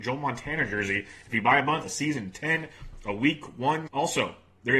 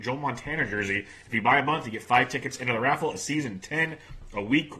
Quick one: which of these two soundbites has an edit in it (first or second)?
first